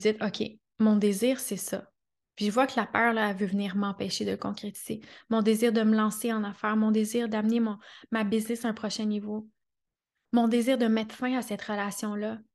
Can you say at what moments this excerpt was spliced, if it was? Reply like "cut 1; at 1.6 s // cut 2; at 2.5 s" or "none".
none